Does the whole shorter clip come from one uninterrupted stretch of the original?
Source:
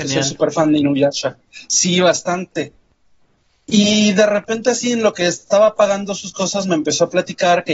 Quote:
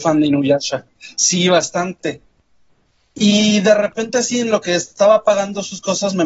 yes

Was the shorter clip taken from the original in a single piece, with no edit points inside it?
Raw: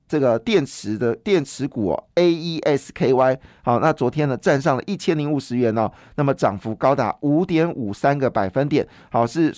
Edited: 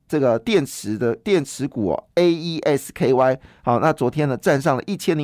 yes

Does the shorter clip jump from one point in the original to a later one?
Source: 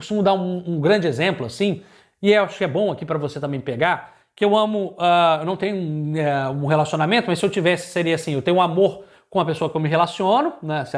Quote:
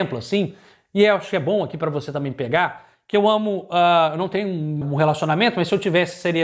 yes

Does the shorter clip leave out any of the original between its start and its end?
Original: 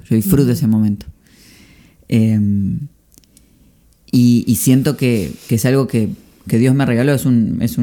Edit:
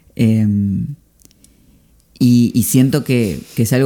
no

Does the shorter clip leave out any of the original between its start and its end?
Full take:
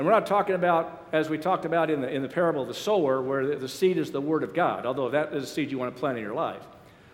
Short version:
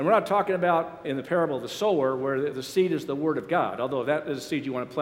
yes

